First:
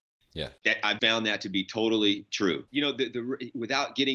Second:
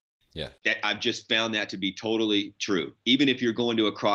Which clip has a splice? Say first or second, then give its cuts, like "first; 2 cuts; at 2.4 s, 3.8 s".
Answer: first; 2 cuts; at 1.0 s, 2.7 s